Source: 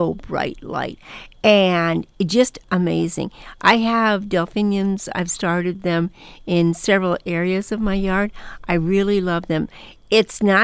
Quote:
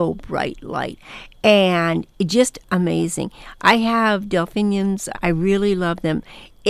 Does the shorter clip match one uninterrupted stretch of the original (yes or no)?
no